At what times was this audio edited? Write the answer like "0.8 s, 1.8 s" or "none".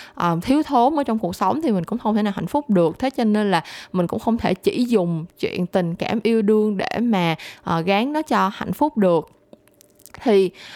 none